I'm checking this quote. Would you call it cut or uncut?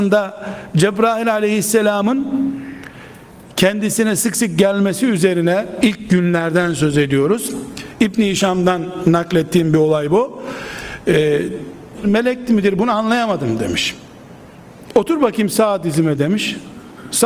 cut